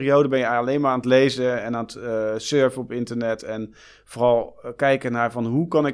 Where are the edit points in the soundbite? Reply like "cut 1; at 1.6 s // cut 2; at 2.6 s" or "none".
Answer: none